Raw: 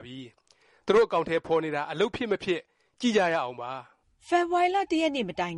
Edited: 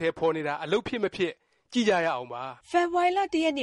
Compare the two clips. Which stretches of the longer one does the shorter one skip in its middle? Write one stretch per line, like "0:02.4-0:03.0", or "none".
0:03.9-0:04.2